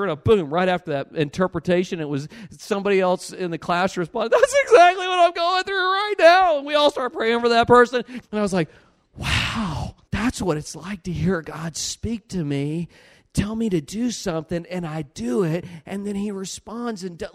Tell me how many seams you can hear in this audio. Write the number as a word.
two